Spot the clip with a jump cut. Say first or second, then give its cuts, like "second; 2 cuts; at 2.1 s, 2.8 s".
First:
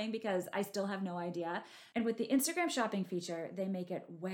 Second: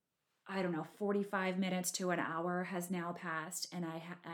first; 1 cut; at 1.9 s